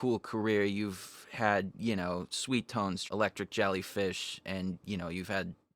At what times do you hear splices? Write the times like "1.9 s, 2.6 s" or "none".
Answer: 3.1 s

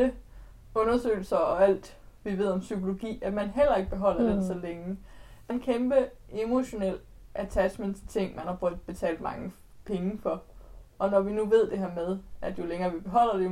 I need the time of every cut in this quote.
5.5 s

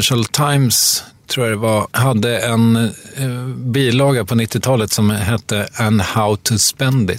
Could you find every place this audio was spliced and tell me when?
none

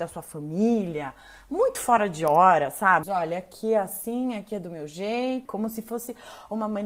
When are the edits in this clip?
3.0 s, 5.5 s

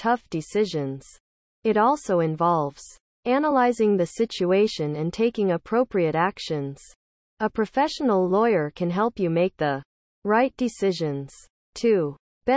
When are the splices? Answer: none

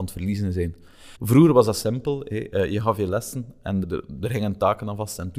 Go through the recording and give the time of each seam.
1.1 s, 3.8 s

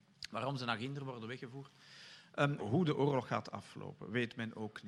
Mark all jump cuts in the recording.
2.6 s

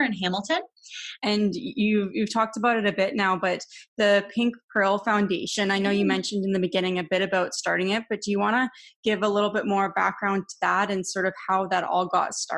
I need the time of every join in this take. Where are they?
1.2 s

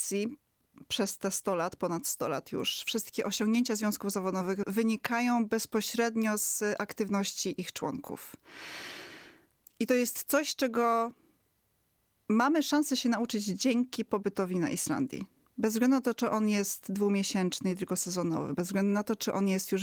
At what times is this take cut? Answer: none

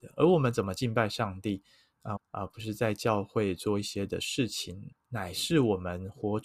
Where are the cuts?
2.2 s, 4.9 s

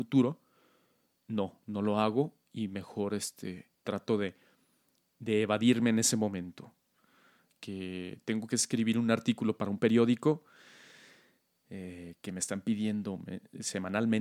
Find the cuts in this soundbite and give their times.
none

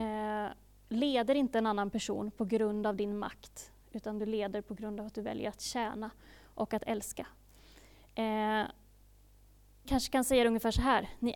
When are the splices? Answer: 9.9 s

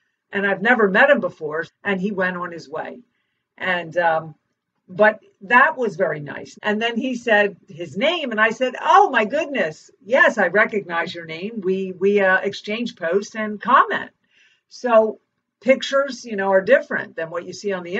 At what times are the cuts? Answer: 1.7 s, 6.5 s

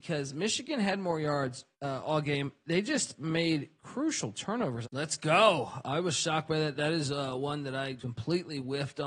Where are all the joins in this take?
1.7 s, 4.8 s, 8.0 s

